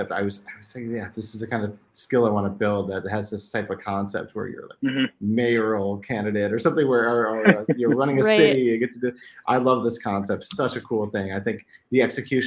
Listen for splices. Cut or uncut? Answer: uncut